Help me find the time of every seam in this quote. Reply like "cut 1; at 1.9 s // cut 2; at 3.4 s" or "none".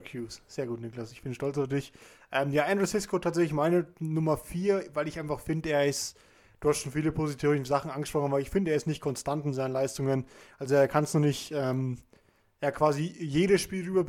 none